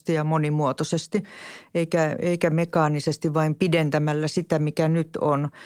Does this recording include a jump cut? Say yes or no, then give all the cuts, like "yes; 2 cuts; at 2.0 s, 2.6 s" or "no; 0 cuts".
no; 0 cuts